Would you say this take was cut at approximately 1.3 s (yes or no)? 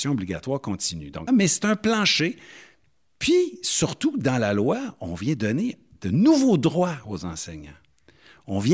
yes